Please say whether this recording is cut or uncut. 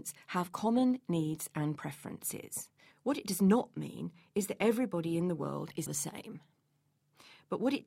cut